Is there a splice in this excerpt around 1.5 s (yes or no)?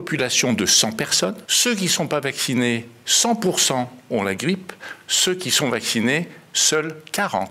yes